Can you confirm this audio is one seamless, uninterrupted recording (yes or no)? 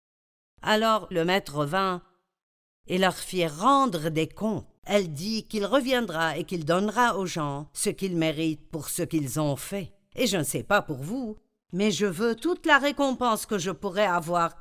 no